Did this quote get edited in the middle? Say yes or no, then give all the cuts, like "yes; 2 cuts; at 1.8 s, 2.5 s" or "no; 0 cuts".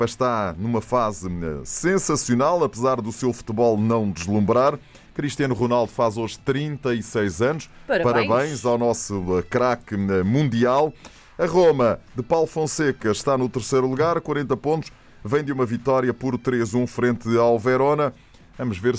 no; 0 cuts